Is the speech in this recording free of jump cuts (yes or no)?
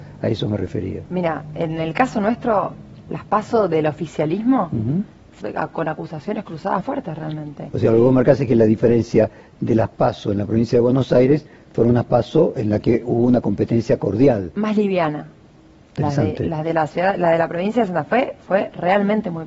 no